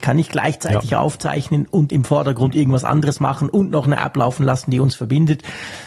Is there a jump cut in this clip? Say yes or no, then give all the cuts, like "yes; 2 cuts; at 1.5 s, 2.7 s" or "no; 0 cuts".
yes; 1 cut; at 1.9 s